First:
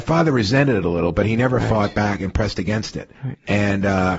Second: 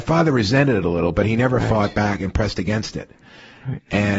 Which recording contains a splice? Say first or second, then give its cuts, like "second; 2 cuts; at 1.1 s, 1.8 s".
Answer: first; 1 cut; at 3.1 s